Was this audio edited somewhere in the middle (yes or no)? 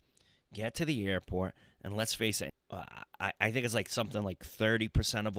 yes